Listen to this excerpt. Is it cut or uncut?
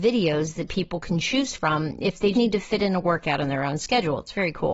cut